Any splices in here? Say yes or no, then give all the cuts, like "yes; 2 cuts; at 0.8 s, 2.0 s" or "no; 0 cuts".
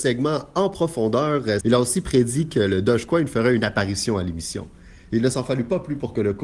yes; 1 cut; at 1.6 s